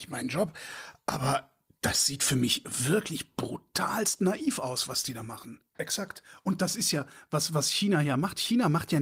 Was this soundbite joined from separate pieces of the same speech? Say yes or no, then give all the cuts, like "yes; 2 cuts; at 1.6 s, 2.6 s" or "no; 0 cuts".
yes; 1 cut; at 5.7 s